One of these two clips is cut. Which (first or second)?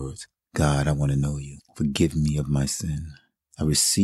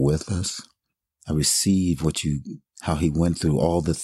second